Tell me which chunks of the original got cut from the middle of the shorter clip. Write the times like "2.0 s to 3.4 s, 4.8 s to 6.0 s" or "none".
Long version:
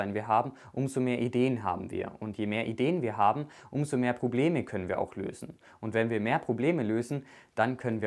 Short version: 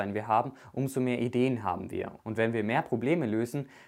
2.2 s to 5.8 s

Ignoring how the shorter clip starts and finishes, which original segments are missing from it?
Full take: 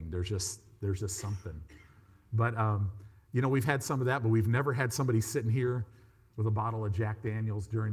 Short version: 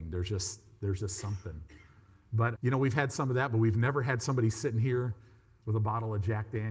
2.5 s to 3.3 s

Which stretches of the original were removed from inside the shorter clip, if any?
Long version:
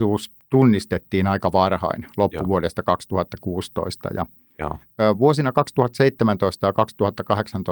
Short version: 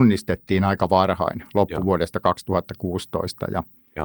none

